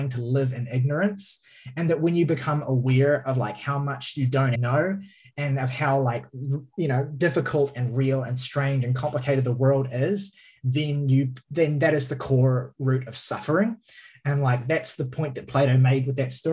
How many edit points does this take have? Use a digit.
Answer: 1